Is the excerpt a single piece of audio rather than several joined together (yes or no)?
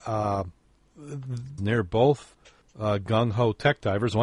no